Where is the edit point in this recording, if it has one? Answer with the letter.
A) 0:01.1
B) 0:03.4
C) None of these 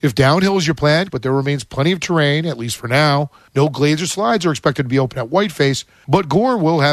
A